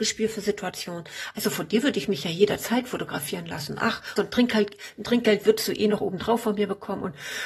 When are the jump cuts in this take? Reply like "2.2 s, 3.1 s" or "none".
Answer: 4.2 s